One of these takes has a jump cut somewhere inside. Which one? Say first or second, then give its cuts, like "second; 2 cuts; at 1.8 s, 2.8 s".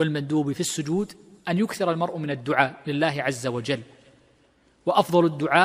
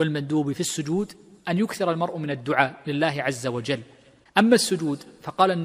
second; 1 cut; at 4.2 s